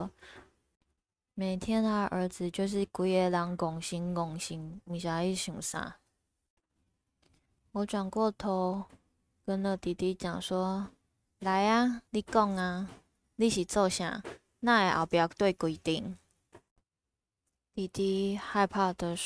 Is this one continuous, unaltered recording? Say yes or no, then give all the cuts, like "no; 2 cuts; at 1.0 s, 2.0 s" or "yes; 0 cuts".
no; 1 cut; at 12.1 s